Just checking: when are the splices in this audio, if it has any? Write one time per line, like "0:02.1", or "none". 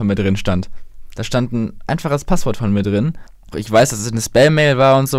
0:03.5